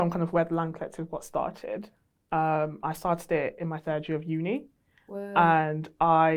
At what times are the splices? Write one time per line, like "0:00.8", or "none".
none

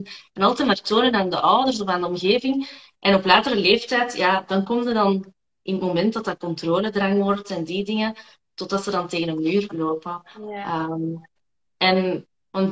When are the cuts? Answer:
none

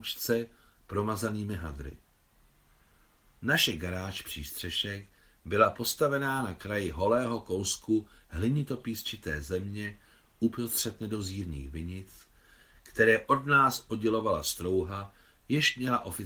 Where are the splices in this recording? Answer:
none

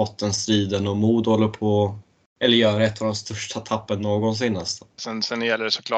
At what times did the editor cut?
0:05.0

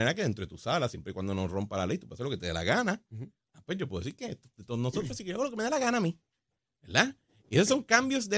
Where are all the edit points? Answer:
none

